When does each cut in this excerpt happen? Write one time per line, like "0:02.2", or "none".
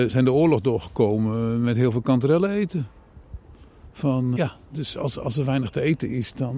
0:04.4

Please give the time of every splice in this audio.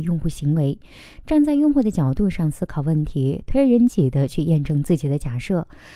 0:03.9

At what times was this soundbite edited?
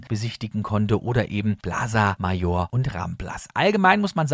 none

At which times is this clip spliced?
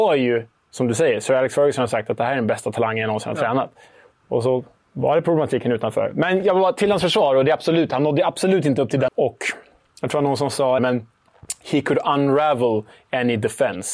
0:09.1
0:10.8

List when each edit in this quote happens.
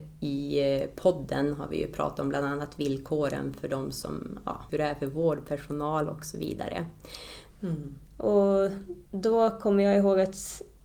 0:04.7
0:07.5
0:09.1

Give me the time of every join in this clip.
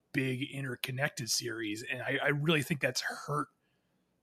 none

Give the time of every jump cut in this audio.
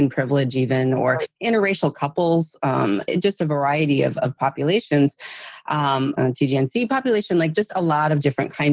0:03.1
0:06.2

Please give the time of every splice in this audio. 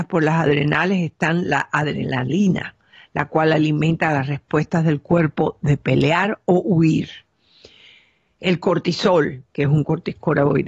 0:09.5

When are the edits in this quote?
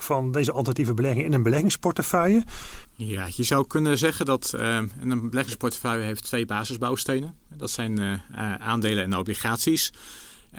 0:02.8

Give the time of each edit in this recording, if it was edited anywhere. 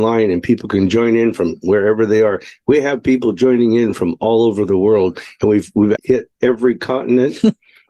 0:06.0

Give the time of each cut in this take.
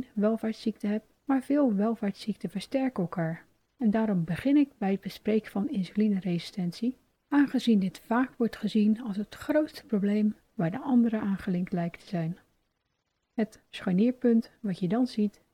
0:13.1

